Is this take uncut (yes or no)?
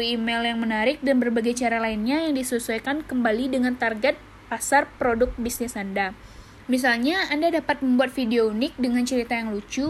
no